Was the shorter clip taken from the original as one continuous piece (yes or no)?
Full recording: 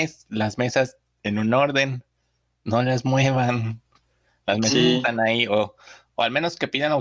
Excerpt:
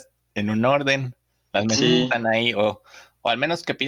no